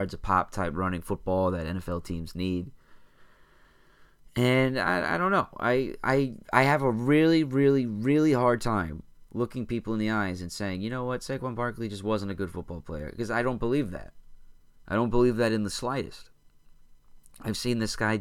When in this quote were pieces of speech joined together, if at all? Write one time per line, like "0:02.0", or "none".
none